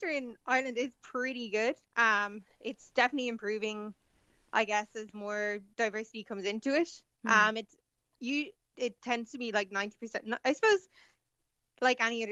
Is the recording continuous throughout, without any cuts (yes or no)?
yes